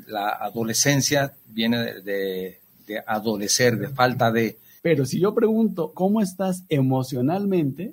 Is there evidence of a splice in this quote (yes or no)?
yes